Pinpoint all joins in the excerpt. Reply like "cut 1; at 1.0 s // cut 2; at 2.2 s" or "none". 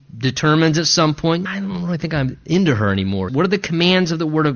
cut 1; at 1.5 s // cut 2; at 3.3 s